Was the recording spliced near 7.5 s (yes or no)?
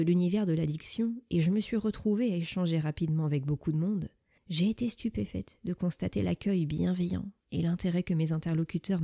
no